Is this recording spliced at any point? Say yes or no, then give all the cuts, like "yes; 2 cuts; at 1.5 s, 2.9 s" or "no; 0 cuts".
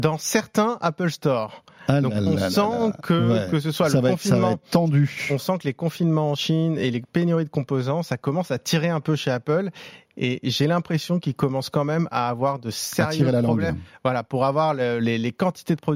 no; 0 cuts